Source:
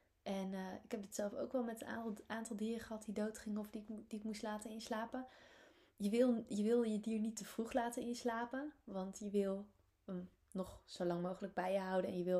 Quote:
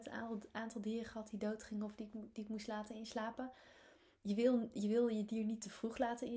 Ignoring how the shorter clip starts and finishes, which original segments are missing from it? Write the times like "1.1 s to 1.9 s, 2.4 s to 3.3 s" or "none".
none